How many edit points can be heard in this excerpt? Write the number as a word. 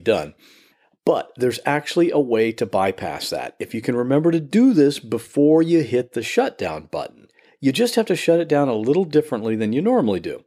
zero